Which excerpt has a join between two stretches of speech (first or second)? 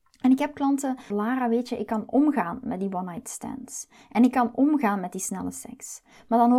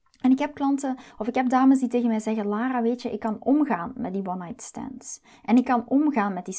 first